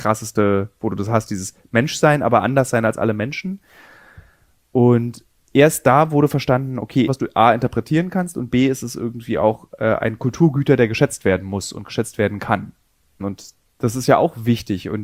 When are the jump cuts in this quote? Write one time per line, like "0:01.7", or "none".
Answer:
0:07.1
0:13.2